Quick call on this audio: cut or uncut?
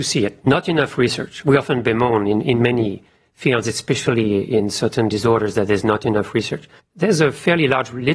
cut